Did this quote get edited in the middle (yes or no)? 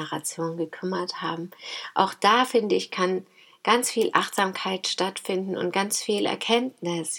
no